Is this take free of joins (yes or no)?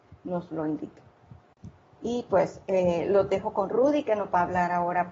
yes